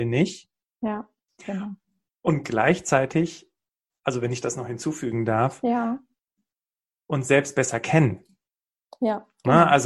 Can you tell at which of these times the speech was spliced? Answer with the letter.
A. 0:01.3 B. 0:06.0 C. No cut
A